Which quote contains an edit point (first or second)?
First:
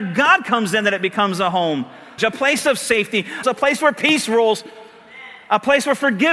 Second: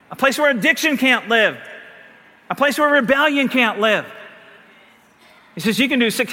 first